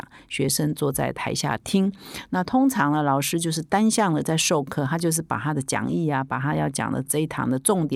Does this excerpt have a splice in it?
no; 0 cuts

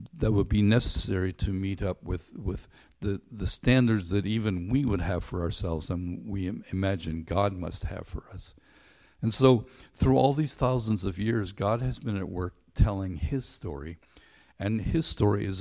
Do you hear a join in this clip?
no; 0 cuts

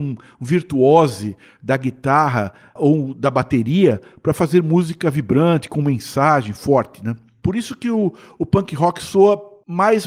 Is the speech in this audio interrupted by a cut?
no; 0 cuts

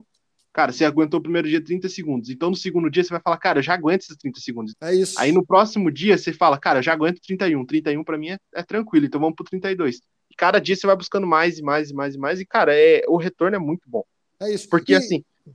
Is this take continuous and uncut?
no; 1 cut; at 4.7 s

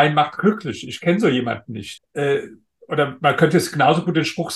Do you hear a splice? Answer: yes; 1 cut; at 2.0 s

